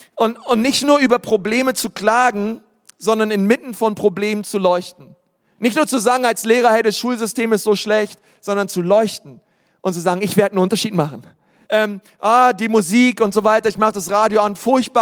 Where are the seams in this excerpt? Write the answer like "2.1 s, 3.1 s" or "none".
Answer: 11.6 s